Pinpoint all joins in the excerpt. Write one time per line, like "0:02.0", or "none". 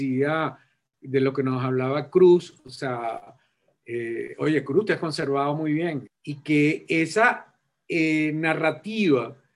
0:06.1